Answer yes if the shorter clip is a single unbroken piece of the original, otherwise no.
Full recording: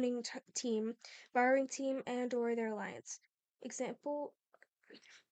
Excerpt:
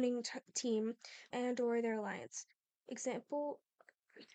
no